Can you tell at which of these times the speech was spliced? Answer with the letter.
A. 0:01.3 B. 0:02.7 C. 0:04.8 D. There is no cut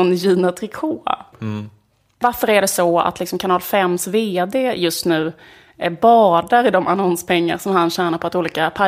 A